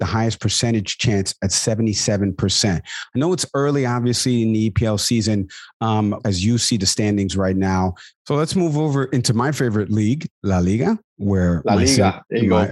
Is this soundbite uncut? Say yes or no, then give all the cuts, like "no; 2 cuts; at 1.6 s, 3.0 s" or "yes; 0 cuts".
no; 2 cuts; at 6.2 s, 8.1 s